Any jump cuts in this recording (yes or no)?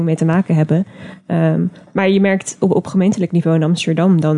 no